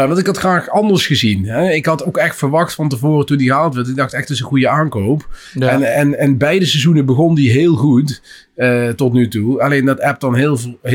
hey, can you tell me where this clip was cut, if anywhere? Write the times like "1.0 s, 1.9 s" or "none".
none